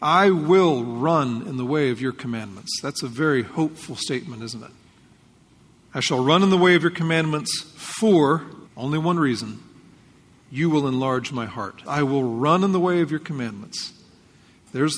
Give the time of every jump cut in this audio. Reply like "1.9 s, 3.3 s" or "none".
5.8 s, 8.7 s, 11.9 s